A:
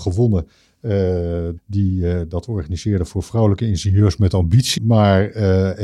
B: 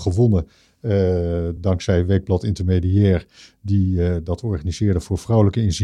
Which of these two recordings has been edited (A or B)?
A